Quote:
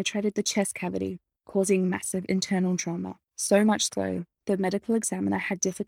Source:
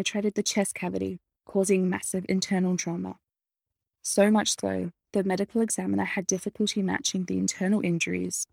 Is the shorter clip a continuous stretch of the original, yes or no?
no